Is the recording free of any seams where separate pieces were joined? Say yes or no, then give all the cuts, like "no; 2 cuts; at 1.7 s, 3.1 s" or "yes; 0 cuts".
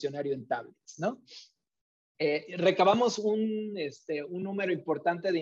yes; 0 cuts